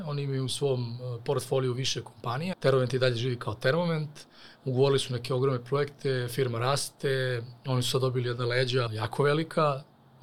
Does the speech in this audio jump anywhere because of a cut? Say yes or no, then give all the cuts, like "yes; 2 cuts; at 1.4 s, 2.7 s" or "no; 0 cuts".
yes; 2 cuts; at 2.5 s, 8.9 s